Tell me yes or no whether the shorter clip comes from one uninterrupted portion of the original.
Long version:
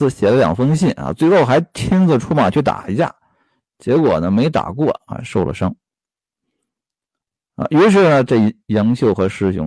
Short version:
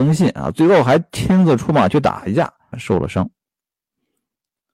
no